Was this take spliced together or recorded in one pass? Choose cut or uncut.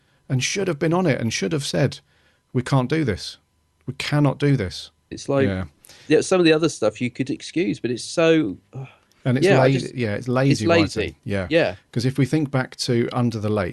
cut